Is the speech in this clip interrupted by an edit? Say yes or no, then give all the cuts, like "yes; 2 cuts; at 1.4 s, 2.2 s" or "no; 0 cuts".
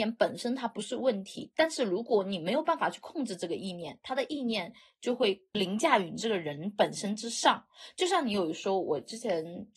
no; 0 cuts